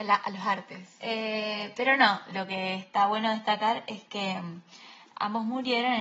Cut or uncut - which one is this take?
cut